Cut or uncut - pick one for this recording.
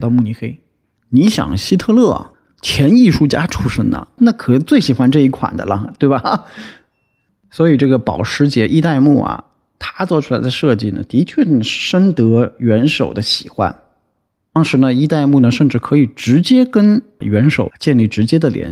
uncut